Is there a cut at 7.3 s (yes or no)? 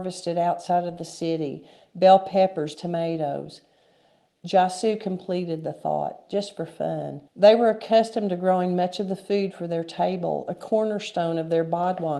yes